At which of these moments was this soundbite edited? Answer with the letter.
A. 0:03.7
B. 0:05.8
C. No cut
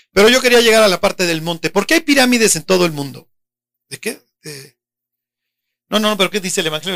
A